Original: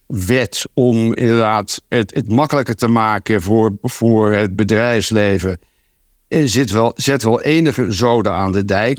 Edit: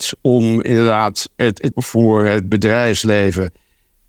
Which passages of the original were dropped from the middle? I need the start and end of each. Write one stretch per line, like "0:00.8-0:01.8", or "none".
0:02.2-0:03.8